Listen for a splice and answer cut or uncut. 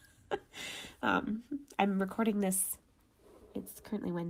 uncut